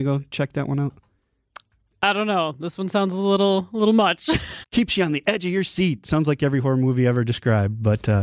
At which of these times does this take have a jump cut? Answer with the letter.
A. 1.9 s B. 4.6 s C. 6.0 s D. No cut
B